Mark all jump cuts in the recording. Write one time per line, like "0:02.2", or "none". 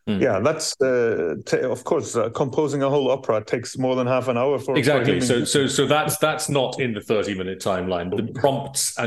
0:08.1